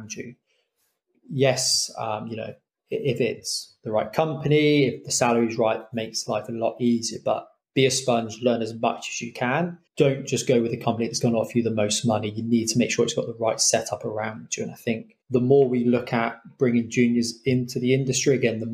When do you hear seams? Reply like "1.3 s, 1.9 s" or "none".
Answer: 9.9 s, 15.2 s